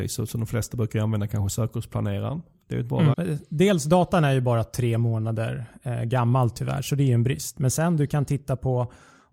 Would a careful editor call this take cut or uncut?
cut